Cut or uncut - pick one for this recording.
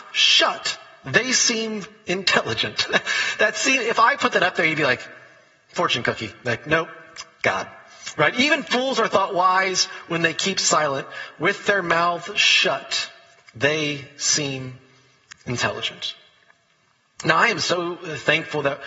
uncut